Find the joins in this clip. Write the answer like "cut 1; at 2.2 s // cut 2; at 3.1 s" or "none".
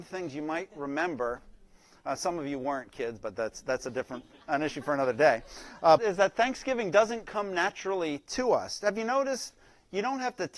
cut 1; at 3.2 s // cut 2; at 6.0 s